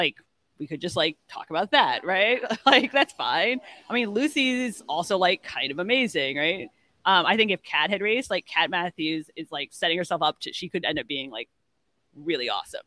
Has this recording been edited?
no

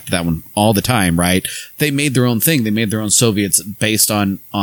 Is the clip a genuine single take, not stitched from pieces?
yes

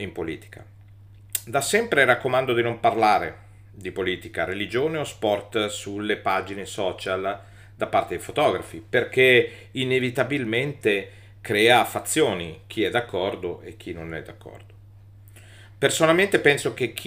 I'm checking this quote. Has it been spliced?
no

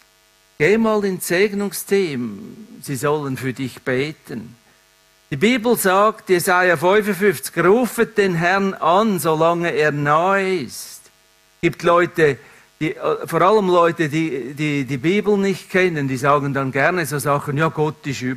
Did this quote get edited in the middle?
no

